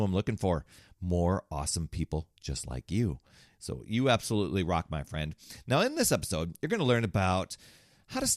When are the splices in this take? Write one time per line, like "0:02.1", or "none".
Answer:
none